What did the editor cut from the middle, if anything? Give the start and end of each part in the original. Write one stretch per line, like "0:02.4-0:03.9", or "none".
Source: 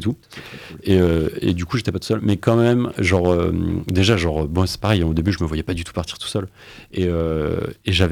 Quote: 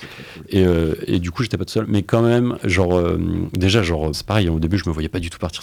0:04.5-0:04.7